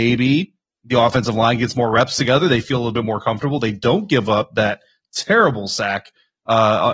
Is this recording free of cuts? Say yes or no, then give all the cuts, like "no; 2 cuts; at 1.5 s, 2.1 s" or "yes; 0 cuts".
yes; 0 cuts